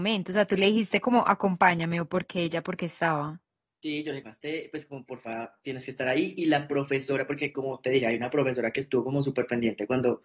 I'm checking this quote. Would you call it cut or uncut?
cut